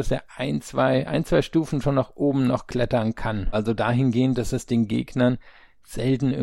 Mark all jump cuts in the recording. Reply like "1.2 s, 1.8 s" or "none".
3.5 s